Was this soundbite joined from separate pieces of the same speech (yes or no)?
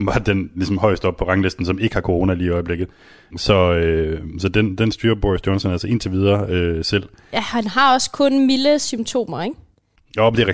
no